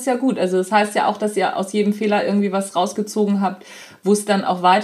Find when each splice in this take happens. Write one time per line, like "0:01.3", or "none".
none

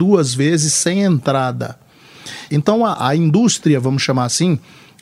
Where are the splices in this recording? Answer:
0:02.5

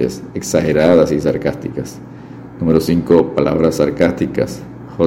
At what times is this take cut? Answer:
none

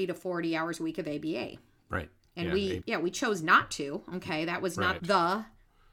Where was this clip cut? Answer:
0:02.8
0:05.0

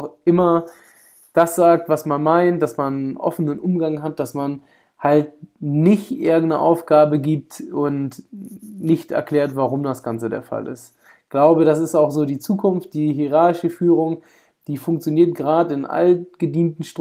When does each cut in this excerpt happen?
none

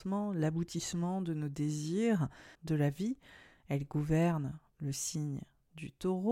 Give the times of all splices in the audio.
0:02.6

